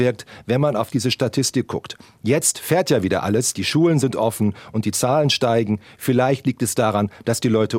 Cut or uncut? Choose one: uncut